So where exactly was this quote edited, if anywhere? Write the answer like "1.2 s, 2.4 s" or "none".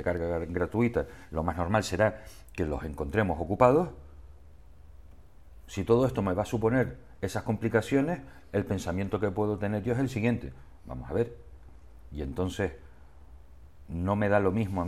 none